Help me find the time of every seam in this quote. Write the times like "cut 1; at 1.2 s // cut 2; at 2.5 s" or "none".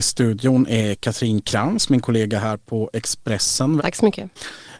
cut 1; at 3.8 s